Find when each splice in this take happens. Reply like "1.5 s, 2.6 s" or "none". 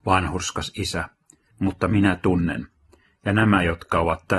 1.5 s